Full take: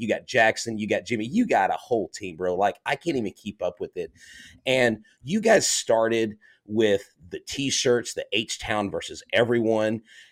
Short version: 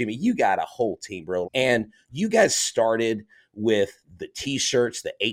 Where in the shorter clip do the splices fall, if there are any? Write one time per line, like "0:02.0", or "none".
0:01.4